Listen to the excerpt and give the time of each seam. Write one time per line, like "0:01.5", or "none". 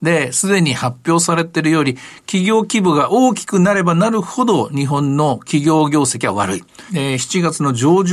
0:06.9